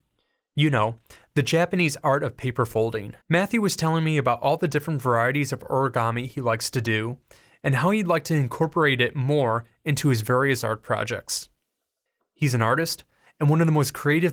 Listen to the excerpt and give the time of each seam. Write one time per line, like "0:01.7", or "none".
0:03.2
0:12.2